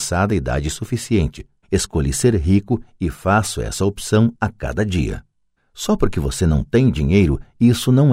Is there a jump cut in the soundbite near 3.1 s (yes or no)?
no